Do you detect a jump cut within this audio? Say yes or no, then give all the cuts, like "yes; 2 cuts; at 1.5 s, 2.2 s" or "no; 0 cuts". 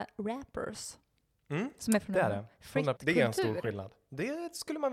yes; 1 cut; at 3.0 s